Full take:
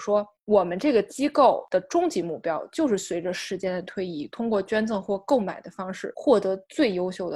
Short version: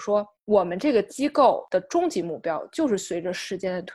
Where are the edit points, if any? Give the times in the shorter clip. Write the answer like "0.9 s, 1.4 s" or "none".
none